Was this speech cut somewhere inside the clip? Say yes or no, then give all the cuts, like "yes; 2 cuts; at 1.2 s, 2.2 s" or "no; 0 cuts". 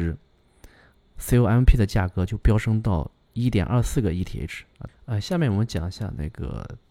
yes; 1 cut; at 4.9 s